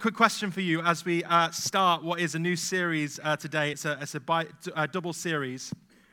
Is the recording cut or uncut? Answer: uncut